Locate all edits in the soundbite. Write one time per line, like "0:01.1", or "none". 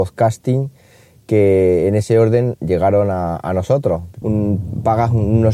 0:04.2

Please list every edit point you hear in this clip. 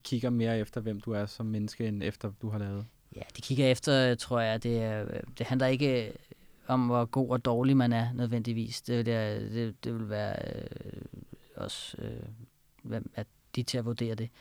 0:02.4

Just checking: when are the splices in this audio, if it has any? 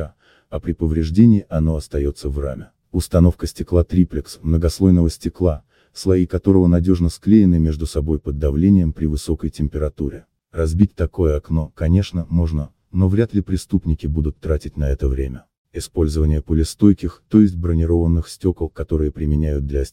none

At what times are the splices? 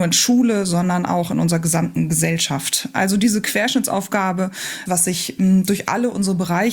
0:04.9

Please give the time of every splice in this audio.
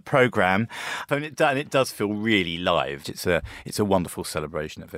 0:01.1
0:03.0

